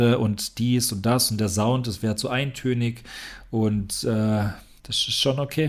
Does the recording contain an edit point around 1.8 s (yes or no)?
no